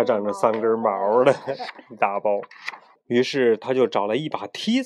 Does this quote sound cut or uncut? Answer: cut